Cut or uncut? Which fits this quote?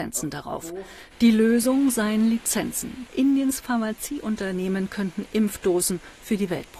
cut